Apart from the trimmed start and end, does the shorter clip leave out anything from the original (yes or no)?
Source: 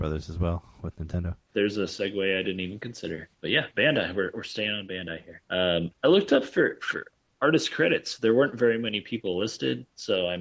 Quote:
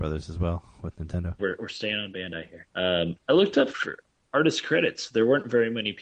yes